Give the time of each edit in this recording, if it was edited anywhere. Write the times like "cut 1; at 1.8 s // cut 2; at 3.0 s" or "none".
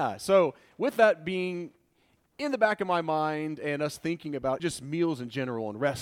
cut 1; at 4.6 s